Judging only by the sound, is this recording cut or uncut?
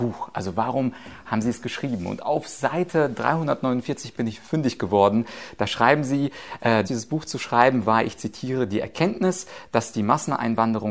cut